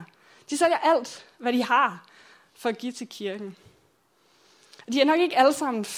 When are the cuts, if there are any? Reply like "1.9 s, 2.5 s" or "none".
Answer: none